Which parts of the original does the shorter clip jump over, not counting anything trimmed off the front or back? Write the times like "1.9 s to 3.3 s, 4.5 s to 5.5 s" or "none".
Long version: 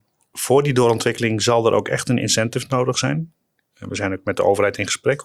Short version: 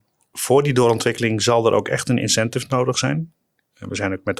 none